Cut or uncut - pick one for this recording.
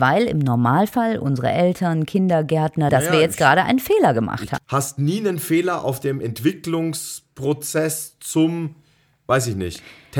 cut